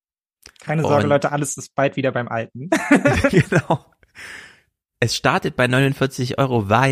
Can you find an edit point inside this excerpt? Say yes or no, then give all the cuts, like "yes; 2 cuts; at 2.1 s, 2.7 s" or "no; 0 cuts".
no; 0 cuts